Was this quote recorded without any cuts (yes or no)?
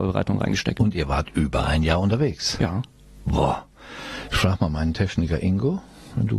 yes